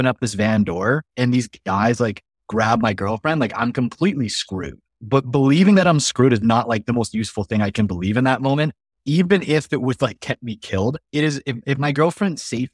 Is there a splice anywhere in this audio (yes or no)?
yes